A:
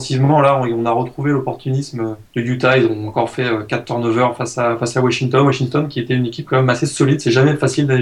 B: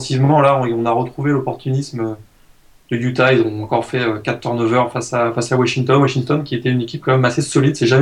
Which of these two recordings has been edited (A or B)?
A